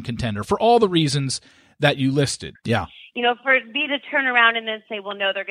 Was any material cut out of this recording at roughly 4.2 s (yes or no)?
no